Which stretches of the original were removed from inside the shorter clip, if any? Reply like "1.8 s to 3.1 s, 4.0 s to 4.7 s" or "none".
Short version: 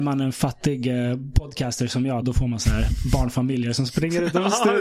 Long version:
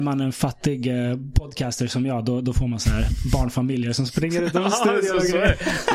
2.2 s to 2.4 s